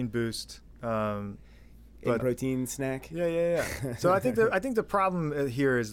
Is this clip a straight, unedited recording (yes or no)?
no